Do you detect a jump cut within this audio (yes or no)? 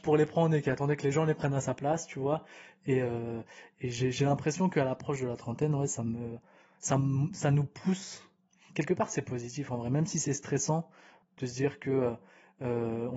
no